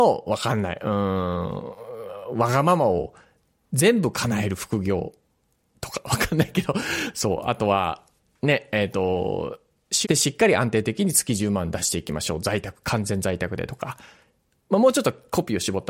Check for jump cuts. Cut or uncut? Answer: cut